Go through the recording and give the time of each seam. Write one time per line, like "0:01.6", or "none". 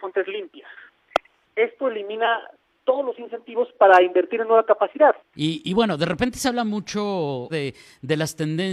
0:01.4
0:05.3
0:07.5

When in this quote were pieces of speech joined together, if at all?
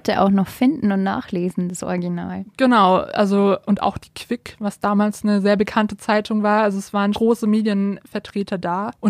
0:07.1

